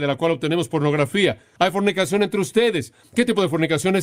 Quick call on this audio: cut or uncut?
cut